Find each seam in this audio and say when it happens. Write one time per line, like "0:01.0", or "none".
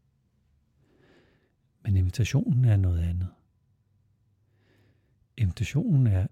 none